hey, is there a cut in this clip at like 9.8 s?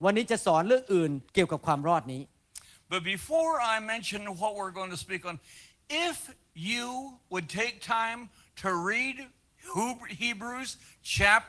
no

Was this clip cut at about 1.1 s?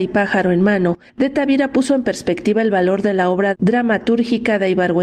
yes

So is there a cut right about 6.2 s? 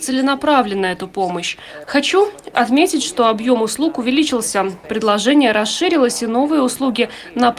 no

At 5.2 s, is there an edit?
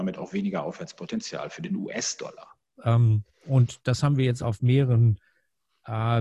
no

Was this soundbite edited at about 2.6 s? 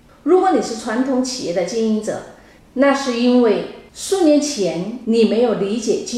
yes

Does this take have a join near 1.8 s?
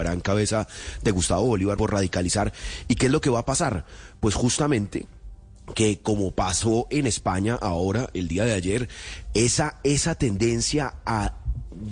yes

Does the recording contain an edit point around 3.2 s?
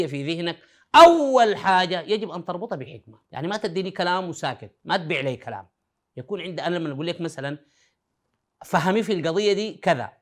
yes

